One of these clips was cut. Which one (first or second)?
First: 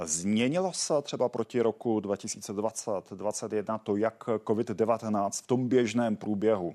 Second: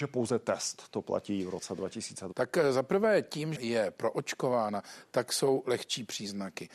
second